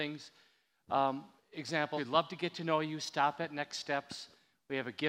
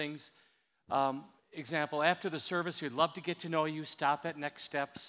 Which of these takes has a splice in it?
first; 1 cut; at 2.0 s

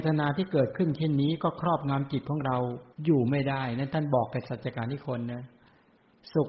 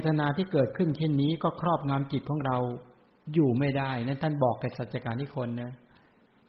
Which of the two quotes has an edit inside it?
first; 1 cut; at 2.9 s

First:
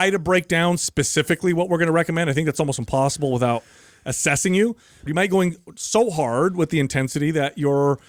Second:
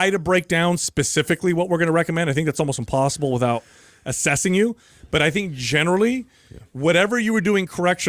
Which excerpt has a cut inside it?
first; 1 cut; at 5.1 s

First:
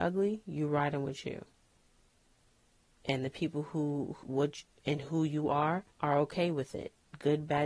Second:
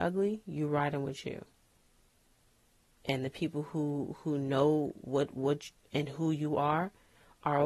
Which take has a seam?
first; 2 cuts; at 4.2 s, 5.9 s

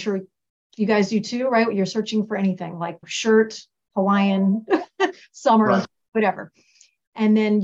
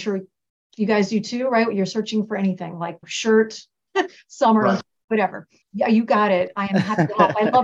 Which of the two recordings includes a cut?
second; 2 cuts; at 3.9 s, 5.6 s

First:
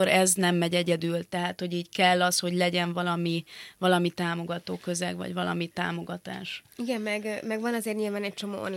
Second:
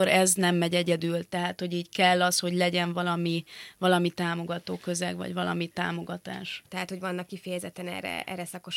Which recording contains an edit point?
second; 1 cut; at 6.7 s

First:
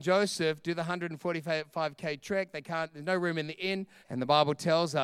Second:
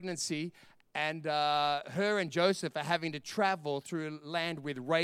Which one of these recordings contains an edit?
first; 1 cut; at 4.0 s

